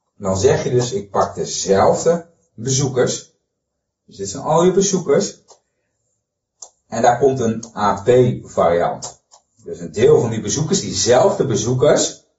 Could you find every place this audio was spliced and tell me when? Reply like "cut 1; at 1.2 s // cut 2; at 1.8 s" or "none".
none